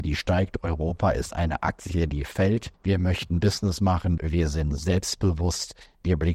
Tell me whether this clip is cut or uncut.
cut